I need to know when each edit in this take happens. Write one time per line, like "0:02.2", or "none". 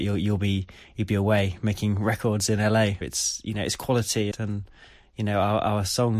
0:03.0
0:04.3